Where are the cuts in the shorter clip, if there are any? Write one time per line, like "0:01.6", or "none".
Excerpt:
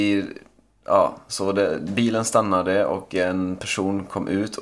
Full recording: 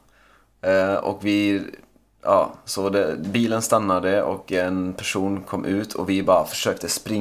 none